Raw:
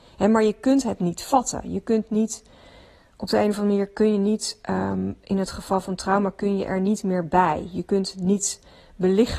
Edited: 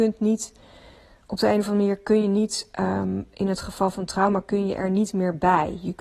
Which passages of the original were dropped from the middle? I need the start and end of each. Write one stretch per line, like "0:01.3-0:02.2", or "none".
none